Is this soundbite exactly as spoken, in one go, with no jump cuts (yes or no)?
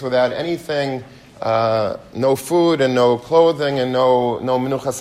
yes